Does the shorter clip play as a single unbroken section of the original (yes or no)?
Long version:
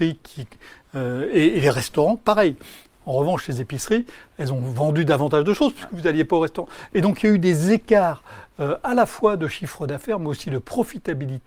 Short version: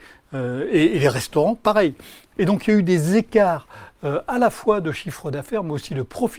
no